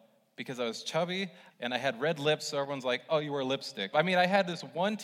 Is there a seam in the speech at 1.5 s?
yes; 2 cuts; at 1.5 s, 3.9 s

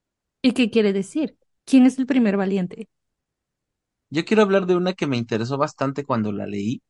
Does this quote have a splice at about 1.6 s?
yes; 1 cut; at 1.6 s

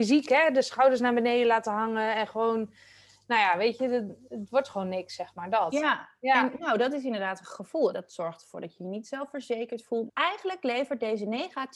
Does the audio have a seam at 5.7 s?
no; 2 cuts; at 7.9 s, 10.1 s

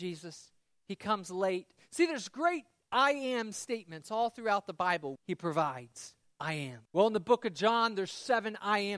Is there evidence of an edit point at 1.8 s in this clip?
yes; 3 cuts; at 1.8 s, 5.2 s, 6.9 s

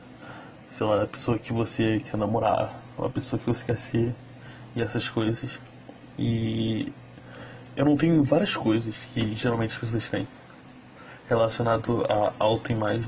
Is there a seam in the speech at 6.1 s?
yes; 1 cut; at 6.1 s

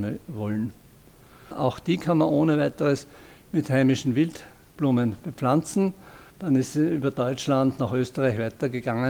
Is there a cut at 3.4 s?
no; 2 cuts; at 1.5 s, 6.3 s

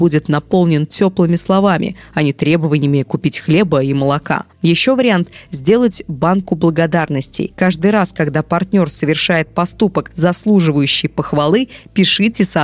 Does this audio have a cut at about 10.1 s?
no; 0 cuts

